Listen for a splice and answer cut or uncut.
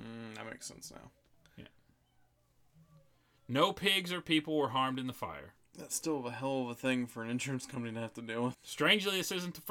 cut